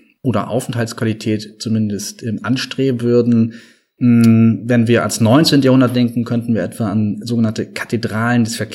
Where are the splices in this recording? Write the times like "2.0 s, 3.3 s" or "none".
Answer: none